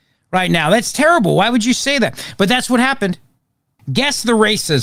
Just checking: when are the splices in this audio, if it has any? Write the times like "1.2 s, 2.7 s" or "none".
3.8 s